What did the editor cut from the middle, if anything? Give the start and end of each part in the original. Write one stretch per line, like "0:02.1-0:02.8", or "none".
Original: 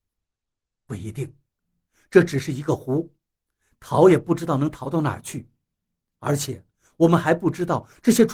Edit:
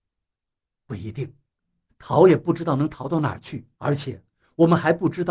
0:01.9-0:03.7
0:05.6-0:06.2